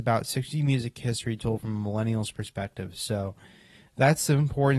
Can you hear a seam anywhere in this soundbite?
no; 0 cuts

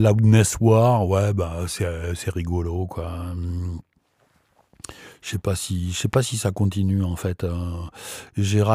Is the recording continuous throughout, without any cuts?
yes; 0 cuts

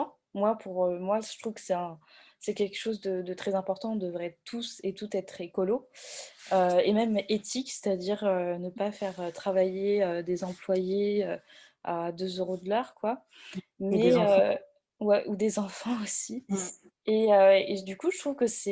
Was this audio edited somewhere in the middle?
no; 0 cuts

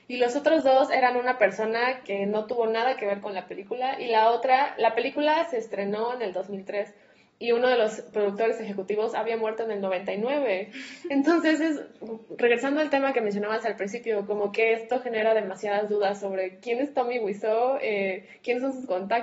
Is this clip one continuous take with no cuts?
yes; 0 cuts

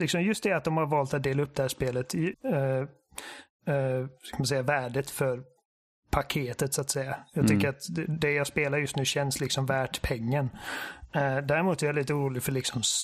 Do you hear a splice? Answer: yes; 1 cut; at 2.3 s

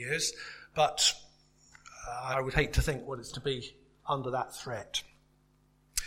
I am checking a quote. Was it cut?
yes; 2 cuts; at 2.3 s, 3.3 s

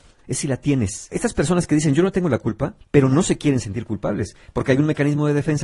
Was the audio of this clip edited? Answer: yes; 2 cuts; at 1.1 s, 2.8 s

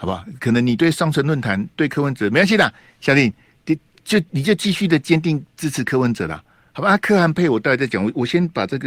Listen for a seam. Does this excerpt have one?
no; 0 cuts

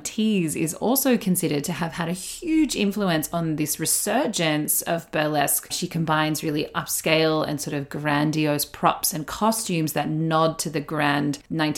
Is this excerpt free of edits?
yes; 0 cuts

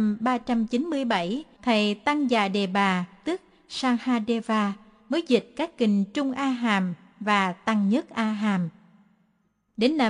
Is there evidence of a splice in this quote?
yes; 1 cut; at 1.6 s

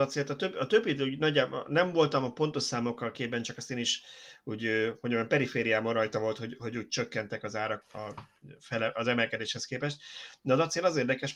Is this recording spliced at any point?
yes; 1 cut; at 7.8 s

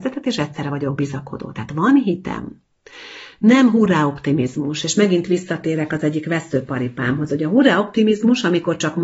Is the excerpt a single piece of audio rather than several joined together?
yes; 0 cuts

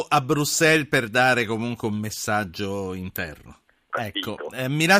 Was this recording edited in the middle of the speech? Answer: yes; 1 cut; at 3.9 s

